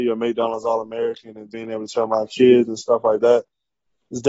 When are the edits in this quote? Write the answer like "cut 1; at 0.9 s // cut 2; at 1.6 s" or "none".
cut 1; at 1.5 s